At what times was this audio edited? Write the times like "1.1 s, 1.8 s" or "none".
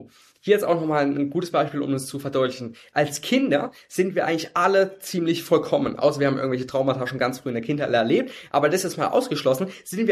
none